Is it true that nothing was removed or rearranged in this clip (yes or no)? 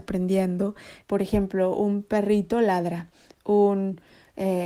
no